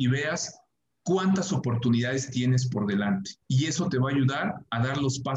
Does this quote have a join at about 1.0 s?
no; 1 cut; at 3.4 s

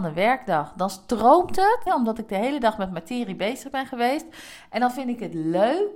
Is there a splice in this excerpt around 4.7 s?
no; 1 cut; at 1.9 s

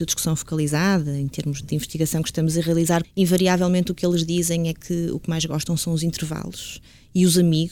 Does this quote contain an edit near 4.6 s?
no; 2 cuts; at 1.6 s, 3.0 s

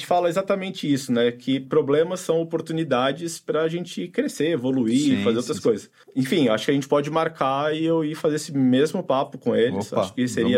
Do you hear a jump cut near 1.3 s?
no; 0 cuts

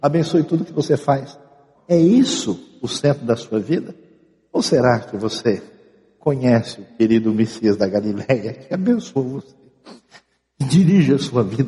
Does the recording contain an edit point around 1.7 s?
yes; 1 cut; at 1.7 s

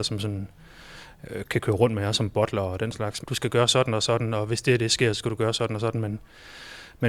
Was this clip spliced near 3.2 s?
yes; 1 cut; at 3.2 s

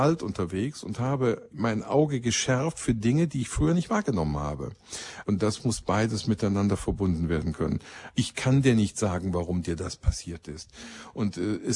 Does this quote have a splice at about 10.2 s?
no; 3 cuts; at 1.5 s, 5.2 s, 8.1 s

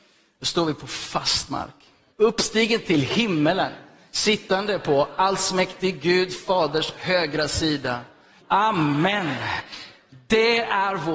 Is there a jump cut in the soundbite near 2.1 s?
yes; 2 cuts; at 2.1 s, 8.4 s

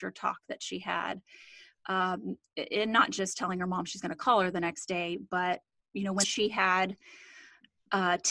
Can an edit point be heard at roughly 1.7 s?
no; 1 cut; at 6.2 s

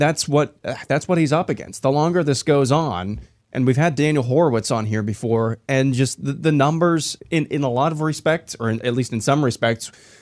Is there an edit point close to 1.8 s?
no; 1 cut; at 7.2 s

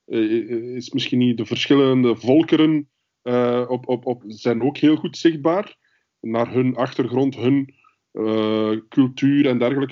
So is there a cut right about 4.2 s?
yes; 1 cut; at 4.2 s

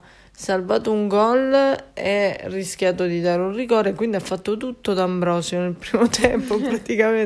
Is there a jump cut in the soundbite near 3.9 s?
no; 0 cuts

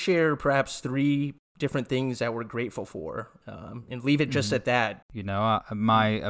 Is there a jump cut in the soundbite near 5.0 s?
yes; 1 cut; at 5.0 s

